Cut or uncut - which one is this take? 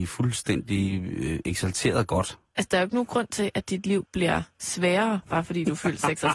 uncut